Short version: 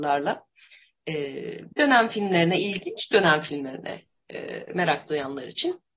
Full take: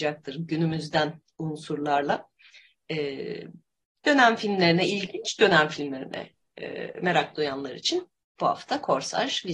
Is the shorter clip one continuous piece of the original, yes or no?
no